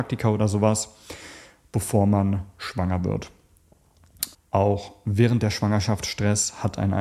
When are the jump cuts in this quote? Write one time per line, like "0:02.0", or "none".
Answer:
0:04.3